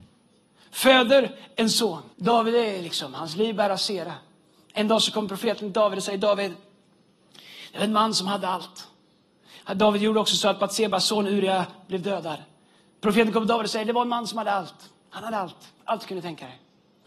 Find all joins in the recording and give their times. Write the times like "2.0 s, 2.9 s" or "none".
2.1 s